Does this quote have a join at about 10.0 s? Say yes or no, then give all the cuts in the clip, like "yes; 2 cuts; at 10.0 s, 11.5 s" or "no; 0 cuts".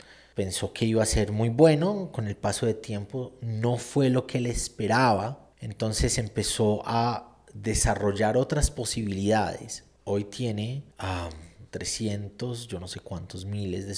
yes; 2 cuts; at 10.0 s, 11.7 s